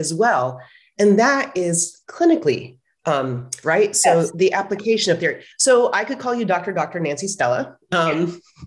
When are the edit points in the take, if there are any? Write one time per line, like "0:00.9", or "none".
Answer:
0:03.6
0:05.5